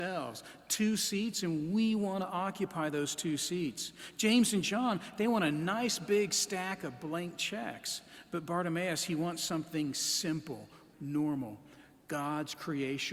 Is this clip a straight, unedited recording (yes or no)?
no